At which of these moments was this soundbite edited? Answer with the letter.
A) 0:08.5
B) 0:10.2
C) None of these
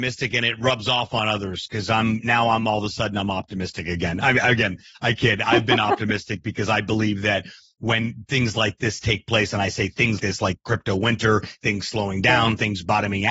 B